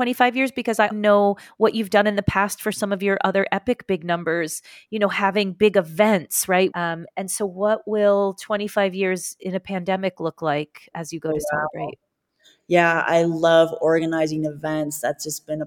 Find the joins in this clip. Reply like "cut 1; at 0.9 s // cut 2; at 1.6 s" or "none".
cut 1; at 0.9 s // cut 2; at 6.7 s // cut 3; at 10.9 s